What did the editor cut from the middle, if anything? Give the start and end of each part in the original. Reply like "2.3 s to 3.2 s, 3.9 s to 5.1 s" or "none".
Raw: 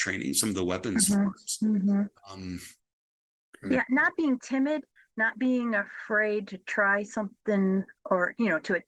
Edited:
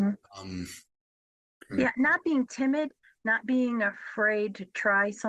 none